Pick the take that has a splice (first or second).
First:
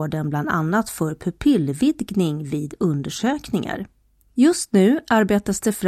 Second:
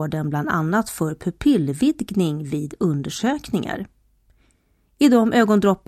first